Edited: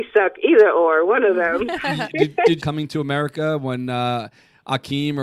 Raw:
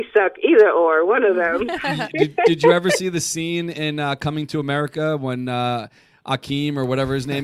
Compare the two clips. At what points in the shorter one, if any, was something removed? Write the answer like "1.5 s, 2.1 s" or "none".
2.6 s